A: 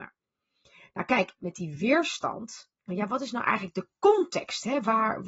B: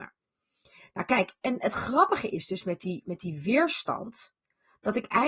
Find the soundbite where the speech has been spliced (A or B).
A